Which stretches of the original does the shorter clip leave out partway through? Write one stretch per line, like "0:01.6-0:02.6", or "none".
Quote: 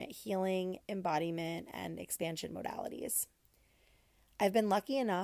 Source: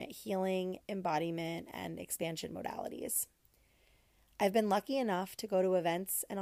none